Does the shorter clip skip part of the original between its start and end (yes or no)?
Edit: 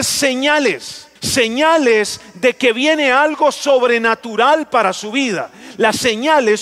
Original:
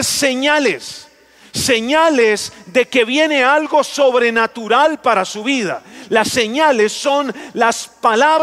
yes